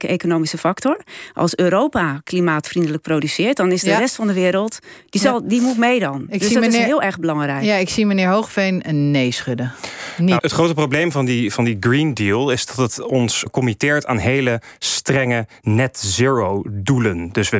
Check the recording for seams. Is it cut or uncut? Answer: cut